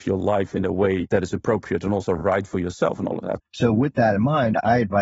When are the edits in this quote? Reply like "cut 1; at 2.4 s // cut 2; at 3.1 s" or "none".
cut 1; at 3.4 s